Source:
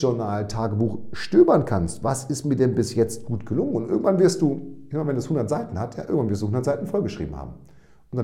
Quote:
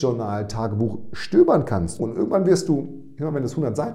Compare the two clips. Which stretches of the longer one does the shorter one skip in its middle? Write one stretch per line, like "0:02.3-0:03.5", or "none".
0:02.0-0:03.7